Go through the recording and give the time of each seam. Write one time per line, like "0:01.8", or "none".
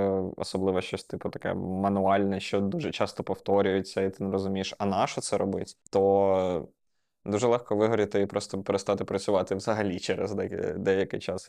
0:05.8